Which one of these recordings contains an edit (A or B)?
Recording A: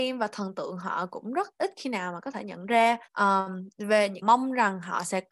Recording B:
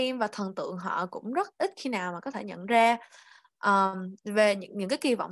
A